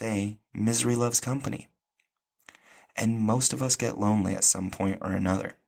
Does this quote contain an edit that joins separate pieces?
no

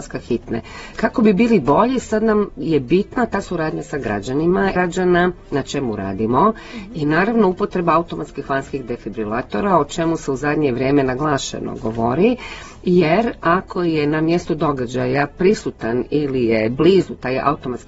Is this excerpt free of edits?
no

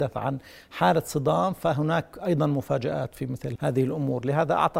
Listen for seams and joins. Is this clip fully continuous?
no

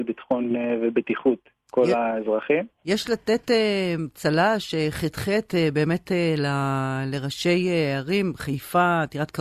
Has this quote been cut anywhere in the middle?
no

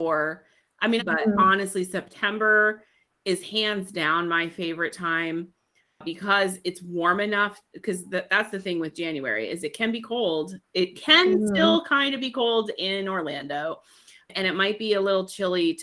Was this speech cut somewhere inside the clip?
yes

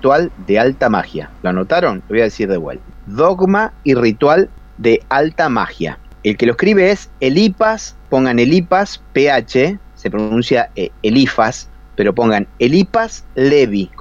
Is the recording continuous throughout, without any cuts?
yes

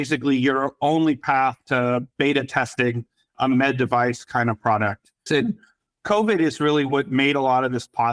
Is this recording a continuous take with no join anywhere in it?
no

